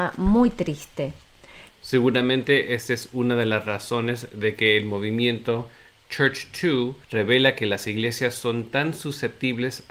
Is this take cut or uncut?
cut